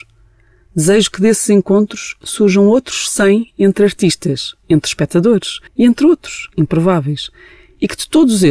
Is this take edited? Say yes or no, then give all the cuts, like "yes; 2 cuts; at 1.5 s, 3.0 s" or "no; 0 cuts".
yes; 1 cut; at 5.7 s